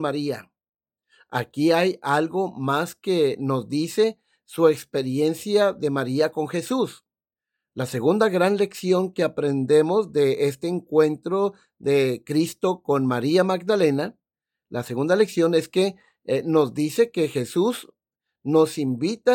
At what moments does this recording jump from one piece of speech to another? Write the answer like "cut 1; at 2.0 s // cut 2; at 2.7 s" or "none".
none